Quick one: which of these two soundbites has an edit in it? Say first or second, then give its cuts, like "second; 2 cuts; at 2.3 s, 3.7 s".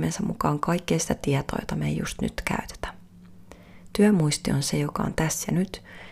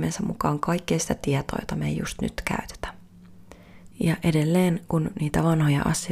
second; 1 cut; at 3.9 s